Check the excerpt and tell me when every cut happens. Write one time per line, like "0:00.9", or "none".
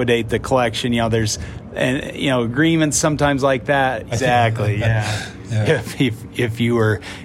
0:04.1
0:05.6